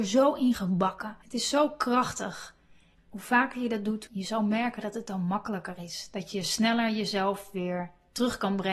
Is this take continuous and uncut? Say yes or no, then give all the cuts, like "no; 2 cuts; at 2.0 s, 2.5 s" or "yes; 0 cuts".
no; 3 cuts; at 1.2 s, 2.9 s, 4.1 s